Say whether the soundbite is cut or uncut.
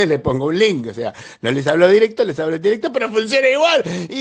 uncut